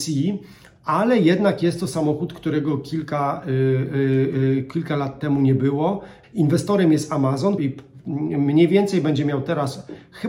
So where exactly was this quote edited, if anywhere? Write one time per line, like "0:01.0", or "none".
0:06.2
0:07.6